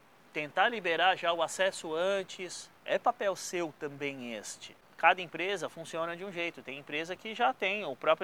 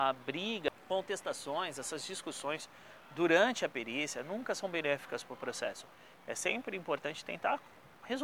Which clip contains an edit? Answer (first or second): first